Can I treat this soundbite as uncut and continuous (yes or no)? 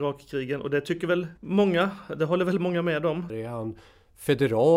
no